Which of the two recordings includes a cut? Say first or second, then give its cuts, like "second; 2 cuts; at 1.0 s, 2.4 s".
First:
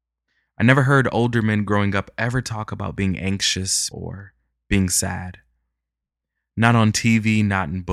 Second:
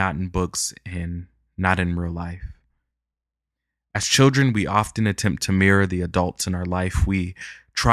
first; 1 cut; at 3.9 s